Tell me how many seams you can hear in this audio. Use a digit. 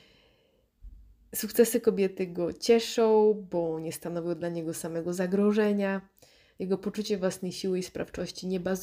0